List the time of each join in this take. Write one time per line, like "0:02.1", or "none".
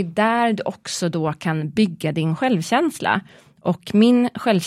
none